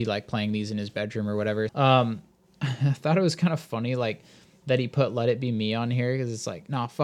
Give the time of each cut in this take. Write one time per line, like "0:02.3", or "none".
0:01.7